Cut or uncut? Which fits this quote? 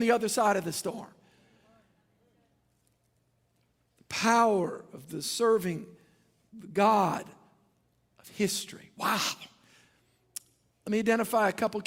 uncut